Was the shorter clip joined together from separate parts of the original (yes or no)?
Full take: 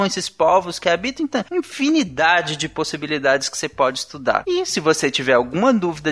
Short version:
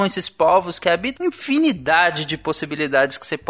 yes